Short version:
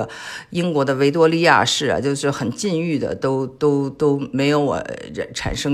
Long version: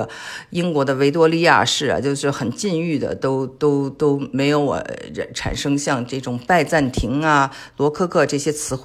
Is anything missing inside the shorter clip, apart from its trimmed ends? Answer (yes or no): no